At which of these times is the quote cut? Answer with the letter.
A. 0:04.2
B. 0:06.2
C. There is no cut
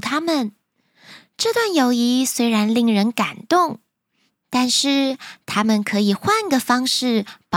C